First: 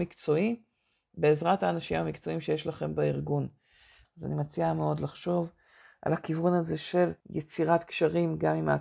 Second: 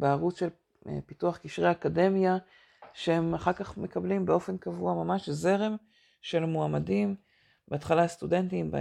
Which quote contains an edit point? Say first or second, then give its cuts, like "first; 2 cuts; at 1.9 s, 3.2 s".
first; 2 cuts; at 4.0 s, 7.2 s